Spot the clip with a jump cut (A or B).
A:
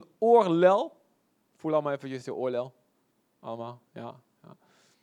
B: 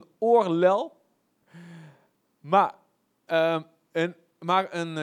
B